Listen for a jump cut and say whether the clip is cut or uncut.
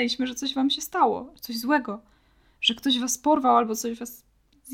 uncut